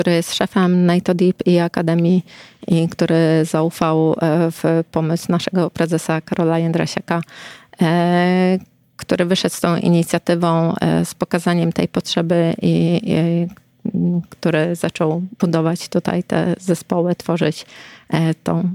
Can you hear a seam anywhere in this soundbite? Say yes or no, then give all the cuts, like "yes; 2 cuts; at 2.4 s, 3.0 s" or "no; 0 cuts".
no; 0 cuts